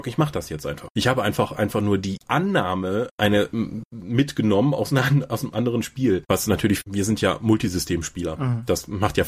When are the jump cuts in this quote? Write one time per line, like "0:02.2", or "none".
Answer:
none